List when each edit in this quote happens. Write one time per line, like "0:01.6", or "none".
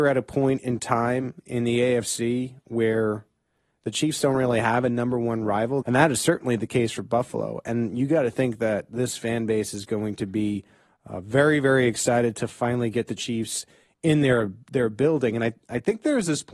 0:05.8